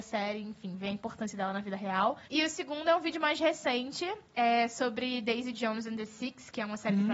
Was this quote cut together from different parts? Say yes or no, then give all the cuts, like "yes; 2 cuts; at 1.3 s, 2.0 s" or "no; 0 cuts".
yes; 1 cut; at 2.2 s